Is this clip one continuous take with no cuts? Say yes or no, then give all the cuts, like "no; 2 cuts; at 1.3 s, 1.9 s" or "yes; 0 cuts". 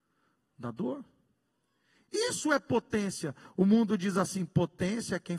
yes; 0 cuts